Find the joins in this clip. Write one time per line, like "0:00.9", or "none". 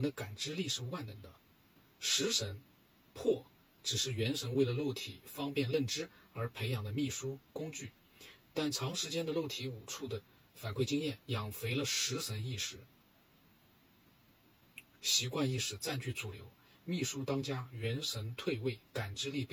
0:11.2